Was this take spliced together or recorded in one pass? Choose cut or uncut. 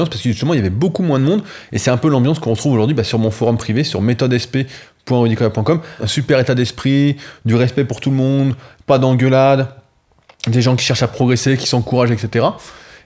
cut